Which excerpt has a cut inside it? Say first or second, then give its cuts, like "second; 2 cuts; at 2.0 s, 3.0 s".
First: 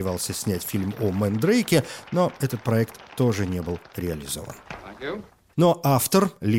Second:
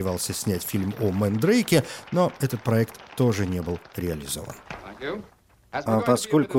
first; 1 cut; at 5.5 s